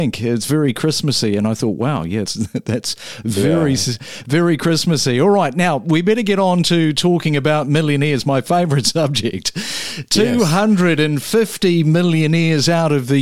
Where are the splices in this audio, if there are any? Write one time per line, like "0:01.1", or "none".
0:02.3